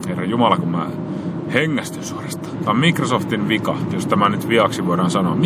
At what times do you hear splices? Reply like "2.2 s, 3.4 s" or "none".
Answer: 2.5 s